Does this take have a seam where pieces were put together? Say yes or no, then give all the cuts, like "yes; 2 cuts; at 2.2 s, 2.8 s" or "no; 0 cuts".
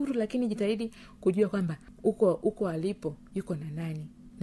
no; 0 cuts